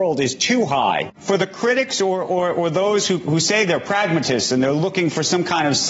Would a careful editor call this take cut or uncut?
cut